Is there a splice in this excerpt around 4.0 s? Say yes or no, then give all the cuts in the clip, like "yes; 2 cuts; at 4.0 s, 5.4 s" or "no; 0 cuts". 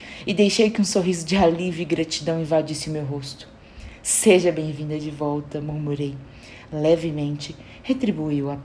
no; 1 cut; at 6.7 s